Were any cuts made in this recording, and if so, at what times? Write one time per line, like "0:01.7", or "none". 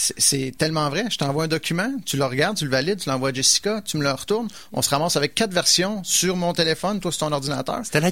none